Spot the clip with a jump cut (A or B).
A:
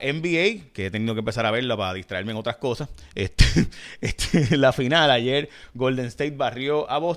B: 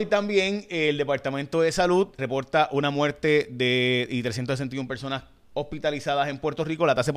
B